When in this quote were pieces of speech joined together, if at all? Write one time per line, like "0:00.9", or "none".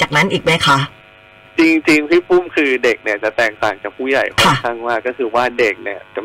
none